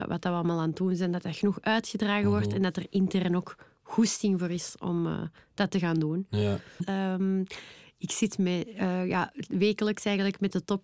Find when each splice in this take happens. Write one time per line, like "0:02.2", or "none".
0:06.8